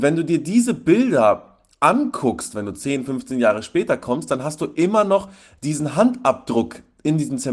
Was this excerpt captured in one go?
yes; 0 cuts

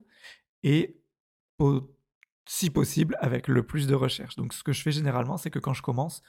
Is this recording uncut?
yes; 0 cuts

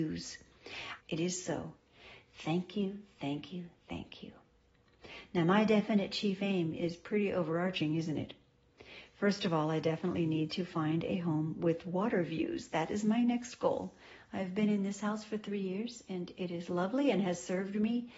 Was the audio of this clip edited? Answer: yes; 1 cut; at 1.0 s

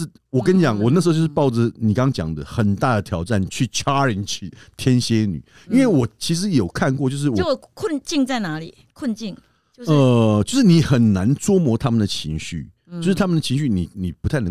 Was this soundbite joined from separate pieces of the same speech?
no; 0 cuts

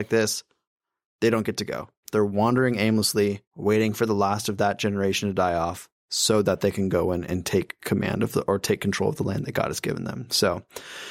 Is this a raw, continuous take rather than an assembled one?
no; 1 cut; at 2.0 s

